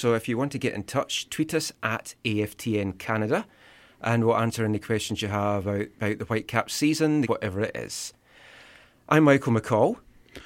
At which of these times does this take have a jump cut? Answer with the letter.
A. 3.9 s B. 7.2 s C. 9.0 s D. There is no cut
B